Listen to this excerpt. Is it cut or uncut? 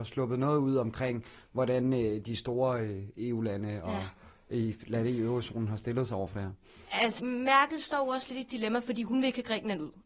cut